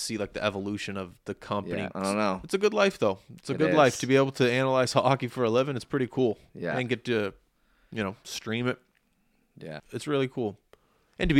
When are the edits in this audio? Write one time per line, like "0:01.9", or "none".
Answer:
0:01.9
0:09.8